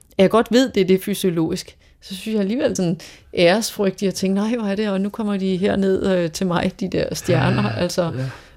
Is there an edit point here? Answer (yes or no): yes